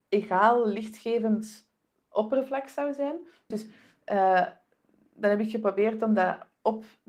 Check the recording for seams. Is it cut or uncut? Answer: cut